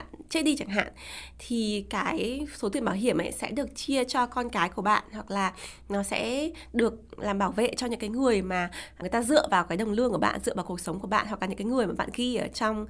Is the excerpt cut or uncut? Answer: cut